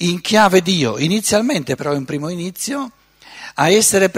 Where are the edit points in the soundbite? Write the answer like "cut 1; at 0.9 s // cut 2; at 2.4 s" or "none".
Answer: cut 1; at 1.8 s